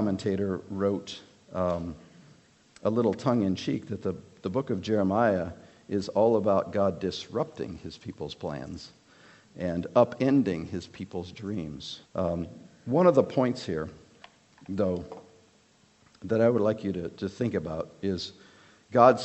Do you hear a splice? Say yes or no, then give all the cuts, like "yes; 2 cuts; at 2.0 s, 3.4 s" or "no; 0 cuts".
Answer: yes; 1 cut; at 12.1 s